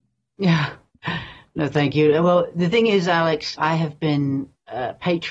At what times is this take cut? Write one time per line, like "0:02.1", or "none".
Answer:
0:03.6